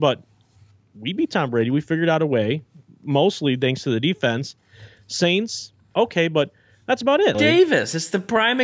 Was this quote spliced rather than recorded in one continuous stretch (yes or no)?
yes